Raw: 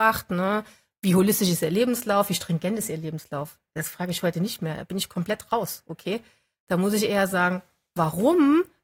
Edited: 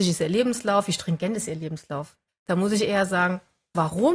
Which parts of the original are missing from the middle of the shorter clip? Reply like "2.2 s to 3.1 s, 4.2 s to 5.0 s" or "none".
3.7 s to 6.5 s